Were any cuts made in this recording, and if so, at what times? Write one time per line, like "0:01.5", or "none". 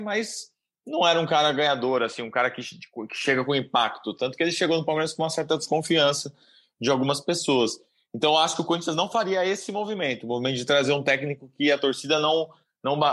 none